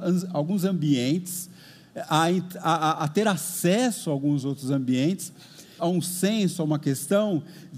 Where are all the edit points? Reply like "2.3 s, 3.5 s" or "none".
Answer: 5.8 s